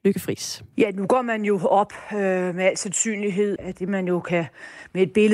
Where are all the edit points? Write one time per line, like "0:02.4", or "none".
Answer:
0:03.6

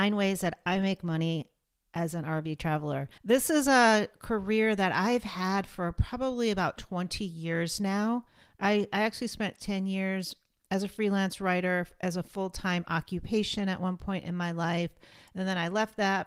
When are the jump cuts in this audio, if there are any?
0:03.2

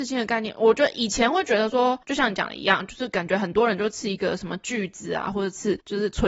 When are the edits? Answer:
0:05.3

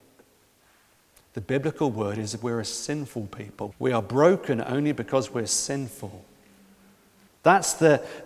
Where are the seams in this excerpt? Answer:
0:03.7
0:07.3

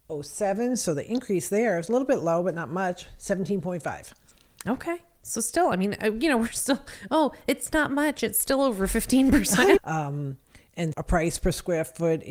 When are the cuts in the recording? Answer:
0:09.8
0:10.9

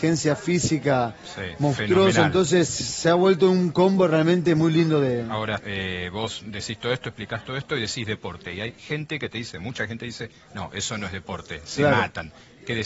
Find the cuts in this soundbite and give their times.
0:05.6

